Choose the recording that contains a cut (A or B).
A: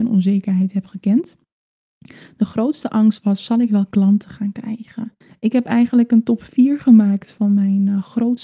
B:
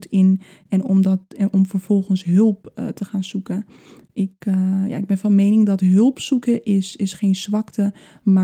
A